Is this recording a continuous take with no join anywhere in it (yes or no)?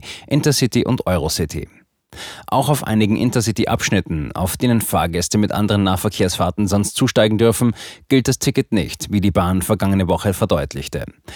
yes